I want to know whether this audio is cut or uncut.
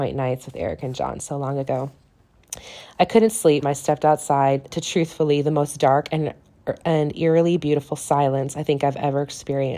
cut